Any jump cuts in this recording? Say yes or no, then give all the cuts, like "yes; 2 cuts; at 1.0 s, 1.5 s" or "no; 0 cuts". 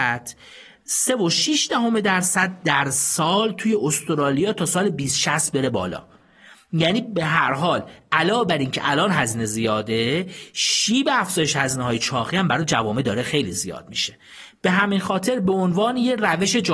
no; 0 cuts